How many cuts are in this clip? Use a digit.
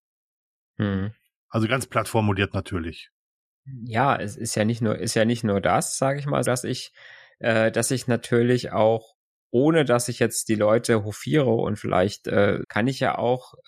2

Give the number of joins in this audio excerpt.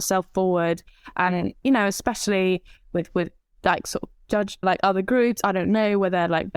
1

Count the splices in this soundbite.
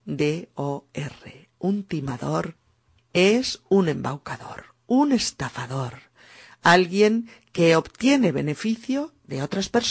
0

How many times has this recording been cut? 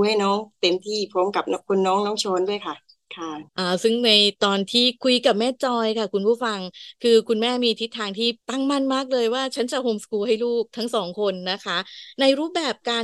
2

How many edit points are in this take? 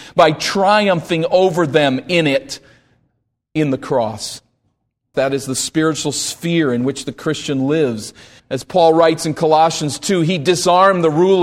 2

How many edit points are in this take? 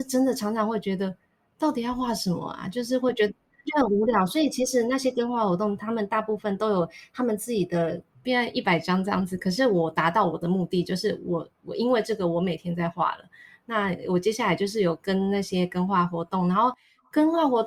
1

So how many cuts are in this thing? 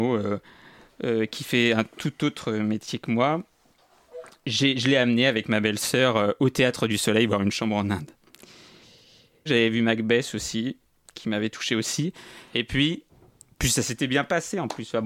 2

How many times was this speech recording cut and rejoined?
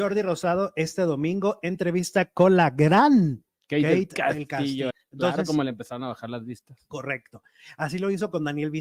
1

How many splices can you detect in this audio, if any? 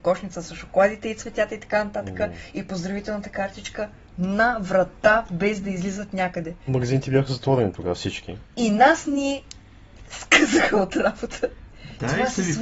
1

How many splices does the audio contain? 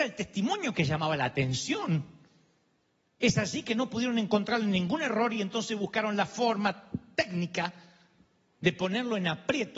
0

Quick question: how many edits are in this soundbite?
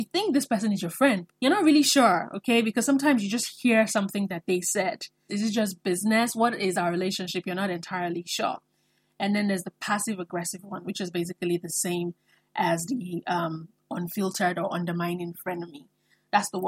2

